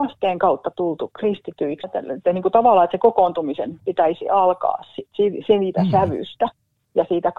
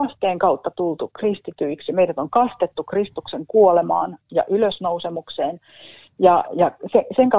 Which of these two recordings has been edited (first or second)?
first